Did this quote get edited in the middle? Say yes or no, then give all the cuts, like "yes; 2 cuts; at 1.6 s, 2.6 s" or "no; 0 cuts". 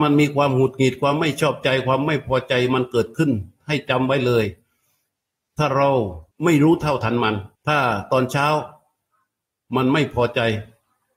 yes; 2 cuts; at 6.3 s, 7.6 s